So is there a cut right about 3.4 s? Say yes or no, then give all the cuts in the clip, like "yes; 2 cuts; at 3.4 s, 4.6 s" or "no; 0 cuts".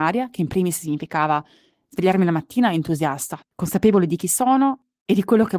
yes; 1 cut; at 3.4 s